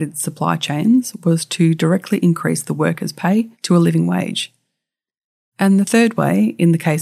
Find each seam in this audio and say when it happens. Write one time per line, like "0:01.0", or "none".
0:03.5